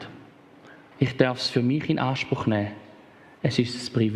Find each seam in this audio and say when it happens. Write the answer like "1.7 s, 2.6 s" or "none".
0.9 s